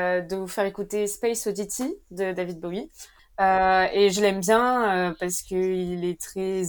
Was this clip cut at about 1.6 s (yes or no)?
no